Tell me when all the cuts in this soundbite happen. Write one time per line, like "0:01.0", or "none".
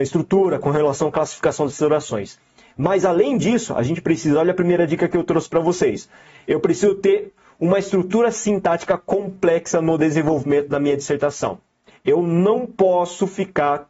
0:02.6
0:11.9